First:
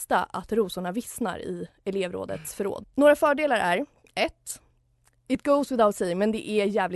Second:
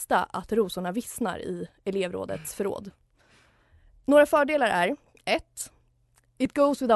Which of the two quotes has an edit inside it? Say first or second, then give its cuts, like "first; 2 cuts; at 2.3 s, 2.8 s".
first; 1 cut; at 2.8 s